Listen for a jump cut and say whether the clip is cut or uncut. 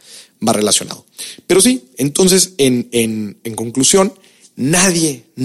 uncut